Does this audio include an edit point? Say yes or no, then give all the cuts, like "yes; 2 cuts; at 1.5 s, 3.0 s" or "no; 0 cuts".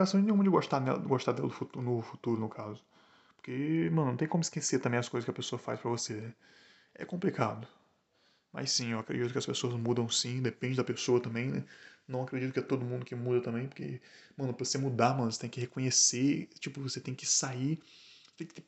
no; 0 cuts